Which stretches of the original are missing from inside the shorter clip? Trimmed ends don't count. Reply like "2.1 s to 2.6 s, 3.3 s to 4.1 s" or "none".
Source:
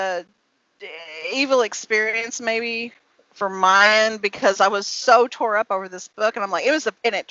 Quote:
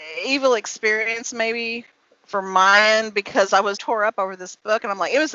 4.8 s to 5.3 s